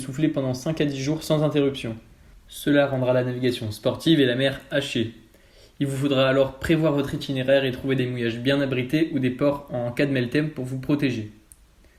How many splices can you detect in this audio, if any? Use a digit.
0